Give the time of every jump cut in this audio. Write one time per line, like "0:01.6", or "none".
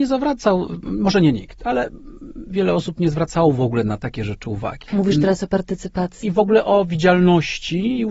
0:02.5
0:04.9
0:06.2